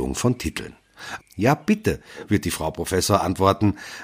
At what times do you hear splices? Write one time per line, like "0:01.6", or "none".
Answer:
0:01.2